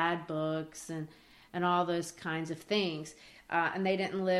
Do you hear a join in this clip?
no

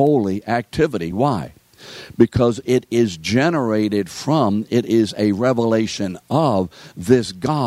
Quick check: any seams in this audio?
no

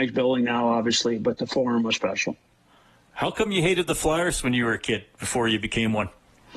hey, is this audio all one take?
yes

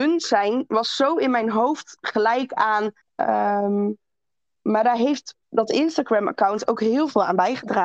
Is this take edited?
yes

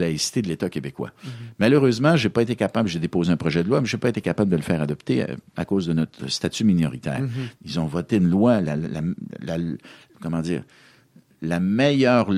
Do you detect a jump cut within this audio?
yes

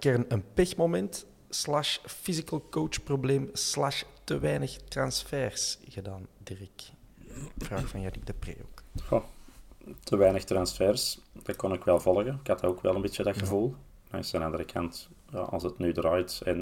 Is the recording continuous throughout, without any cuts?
yes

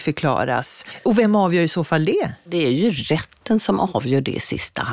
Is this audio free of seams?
yes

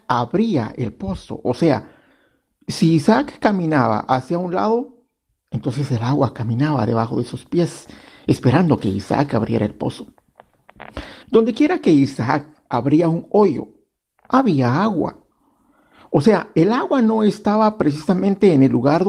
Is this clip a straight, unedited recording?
no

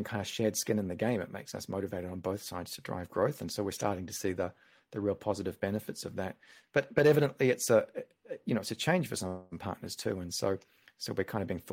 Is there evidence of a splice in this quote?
no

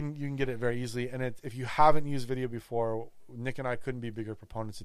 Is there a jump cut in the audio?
no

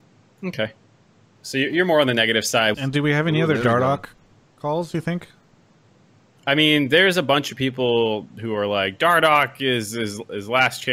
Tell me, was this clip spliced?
yes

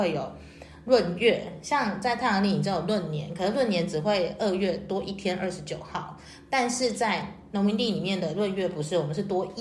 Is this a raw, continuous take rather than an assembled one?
yes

